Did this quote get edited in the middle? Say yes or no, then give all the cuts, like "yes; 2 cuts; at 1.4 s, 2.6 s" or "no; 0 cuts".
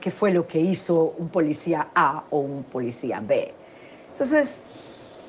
yes; 1 cut; at 4.1 s